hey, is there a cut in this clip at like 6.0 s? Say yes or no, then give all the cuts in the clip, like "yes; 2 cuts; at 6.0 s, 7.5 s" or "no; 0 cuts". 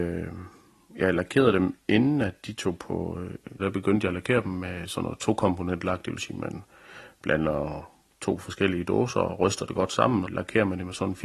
no; 2 cuts; at 3.6 s, 10.3 s